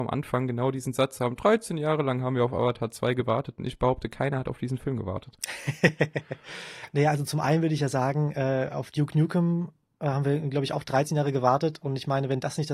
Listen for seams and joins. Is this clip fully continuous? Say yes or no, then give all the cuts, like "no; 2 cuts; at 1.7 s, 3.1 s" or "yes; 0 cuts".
yes; 0 cuts